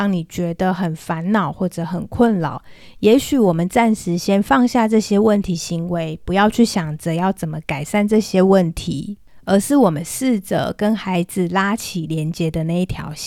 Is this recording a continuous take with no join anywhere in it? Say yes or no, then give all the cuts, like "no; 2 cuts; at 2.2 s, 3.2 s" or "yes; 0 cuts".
yes; 0 cuts